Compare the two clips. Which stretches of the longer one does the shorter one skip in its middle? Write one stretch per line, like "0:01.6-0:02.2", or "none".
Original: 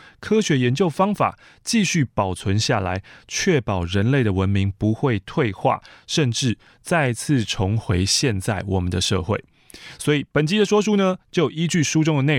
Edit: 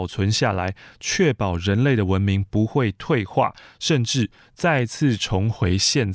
none